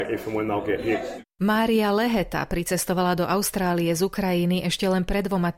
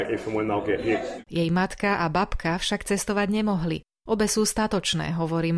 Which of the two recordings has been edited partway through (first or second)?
second